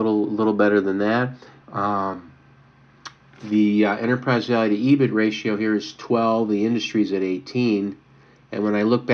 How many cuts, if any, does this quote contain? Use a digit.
1